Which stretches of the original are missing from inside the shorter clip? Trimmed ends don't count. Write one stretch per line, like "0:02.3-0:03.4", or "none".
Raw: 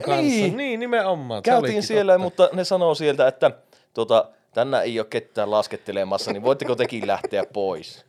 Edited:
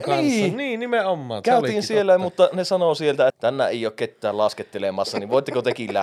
0:03.3-0:04.4

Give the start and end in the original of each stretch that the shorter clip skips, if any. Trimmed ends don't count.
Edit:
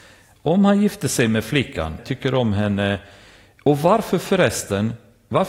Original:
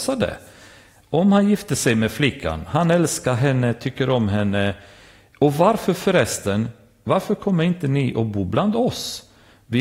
0:02.7-0:03.7

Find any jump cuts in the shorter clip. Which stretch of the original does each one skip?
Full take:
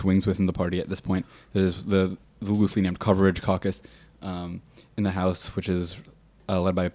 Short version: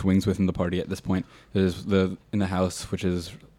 0:02.2-0:04.8

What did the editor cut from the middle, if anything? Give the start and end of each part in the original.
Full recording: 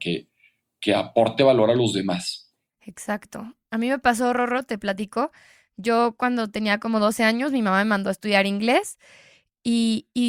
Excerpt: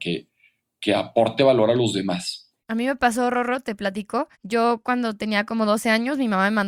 0:02.6-0:03.6
0:05.4-0:05.7

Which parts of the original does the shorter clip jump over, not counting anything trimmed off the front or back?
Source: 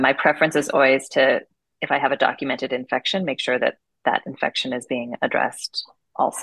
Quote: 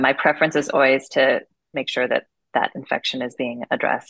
0:01.7-0:03.2

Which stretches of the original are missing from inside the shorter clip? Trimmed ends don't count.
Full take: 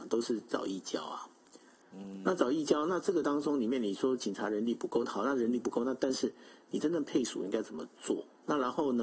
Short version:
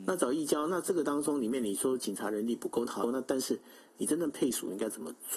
0:05.2-0:05.8

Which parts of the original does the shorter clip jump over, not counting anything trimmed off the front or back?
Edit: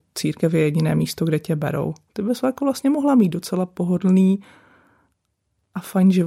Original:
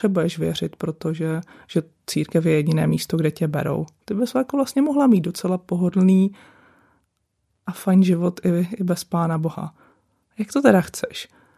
none

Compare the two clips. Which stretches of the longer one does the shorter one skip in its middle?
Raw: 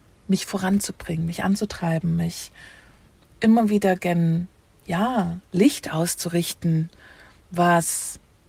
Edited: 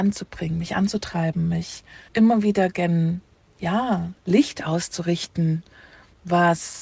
0:02.8-0:03.3

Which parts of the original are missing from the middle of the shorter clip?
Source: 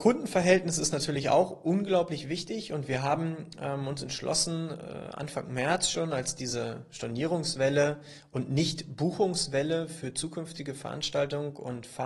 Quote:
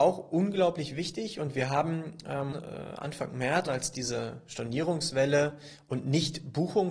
0:03.9-0:04.7
0:05.8-0:06.1

